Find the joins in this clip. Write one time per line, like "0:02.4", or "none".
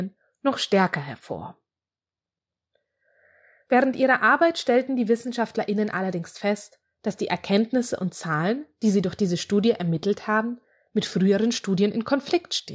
none

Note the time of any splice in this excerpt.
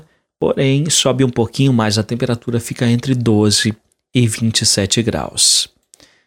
none

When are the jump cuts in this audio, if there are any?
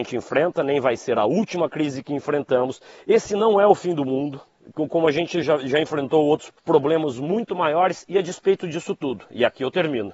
0:05.4
0:06.6

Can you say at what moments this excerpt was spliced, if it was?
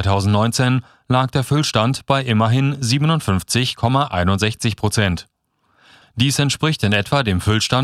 0:06.0

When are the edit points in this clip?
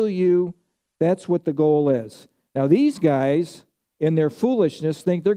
none

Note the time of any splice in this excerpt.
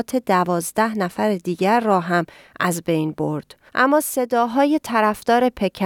0:03.7

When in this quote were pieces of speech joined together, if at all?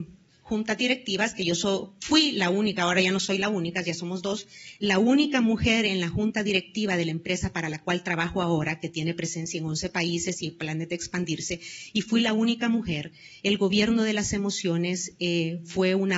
none

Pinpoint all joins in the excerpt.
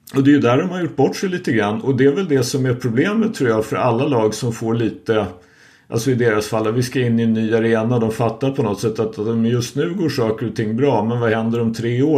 none

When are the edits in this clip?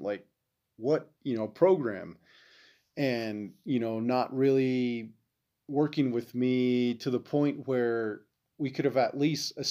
0:01.2
0:05.5

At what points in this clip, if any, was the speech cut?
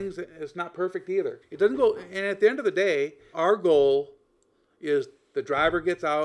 0:01.4
0:03.3

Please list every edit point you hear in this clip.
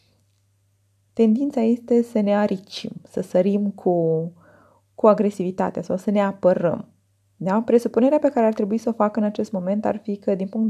none

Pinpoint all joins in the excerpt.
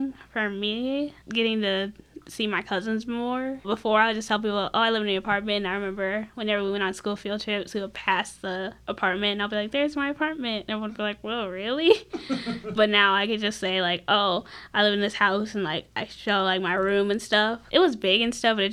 none

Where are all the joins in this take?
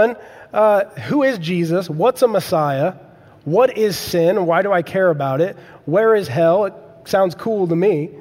none

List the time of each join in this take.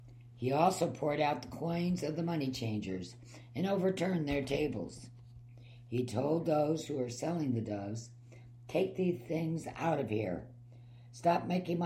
none

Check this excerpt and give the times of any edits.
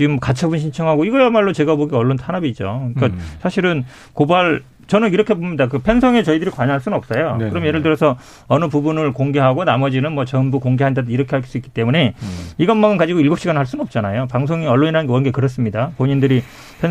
none

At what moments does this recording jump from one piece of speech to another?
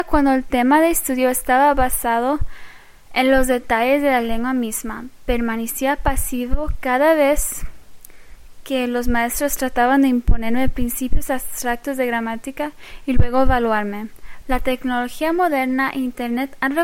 0:14.4

